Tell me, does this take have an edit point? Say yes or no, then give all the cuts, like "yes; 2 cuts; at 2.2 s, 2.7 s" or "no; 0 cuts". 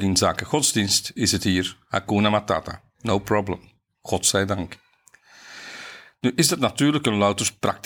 no; 0 cuts